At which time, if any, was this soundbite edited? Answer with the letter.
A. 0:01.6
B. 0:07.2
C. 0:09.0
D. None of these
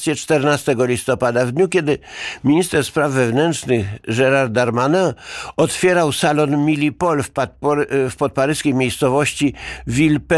D